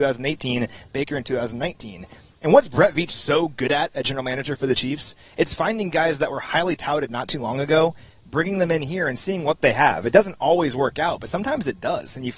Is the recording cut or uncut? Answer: uncut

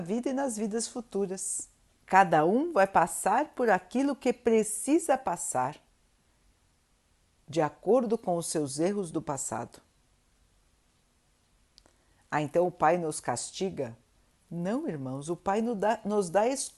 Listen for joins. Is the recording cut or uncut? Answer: cut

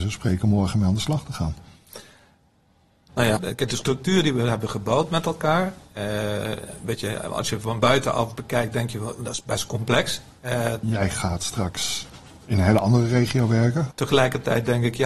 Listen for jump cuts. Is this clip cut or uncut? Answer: cut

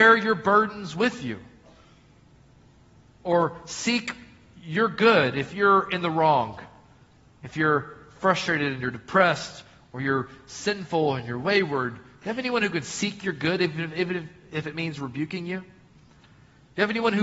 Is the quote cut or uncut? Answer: uncut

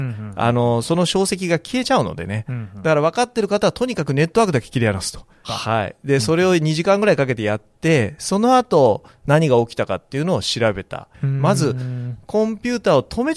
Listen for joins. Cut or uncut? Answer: cut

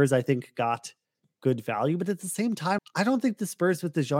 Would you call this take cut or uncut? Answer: cut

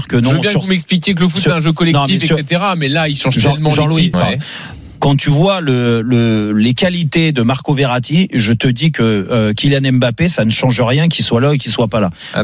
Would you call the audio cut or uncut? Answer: cut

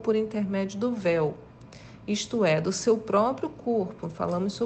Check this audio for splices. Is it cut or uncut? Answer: uncut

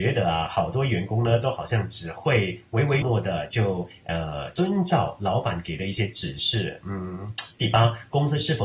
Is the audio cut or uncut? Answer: cut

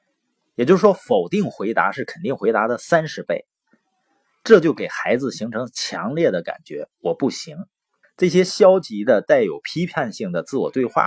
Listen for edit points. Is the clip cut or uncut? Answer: cut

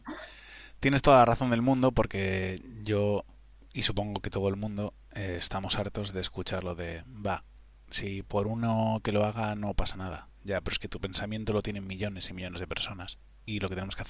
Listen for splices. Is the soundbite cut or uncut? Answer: uncut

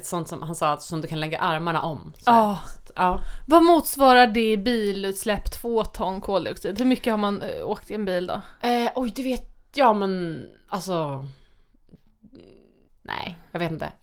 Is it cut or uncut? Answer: cut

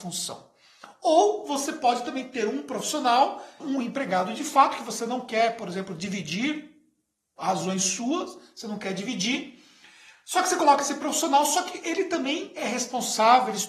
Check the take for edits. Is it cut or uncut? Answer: cut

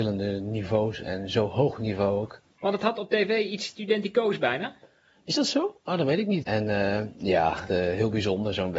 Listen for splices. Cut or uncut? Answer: cut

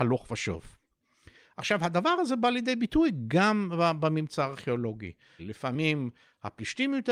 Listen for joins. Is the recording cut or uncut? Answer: cut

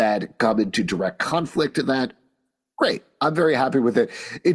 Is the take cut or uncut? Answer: uncut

